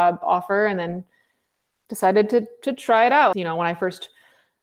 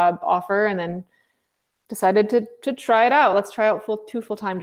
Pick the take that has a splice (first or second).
first